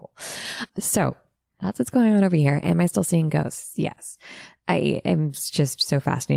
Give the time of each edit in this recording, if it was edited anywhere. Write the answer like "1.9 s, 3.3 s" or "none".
none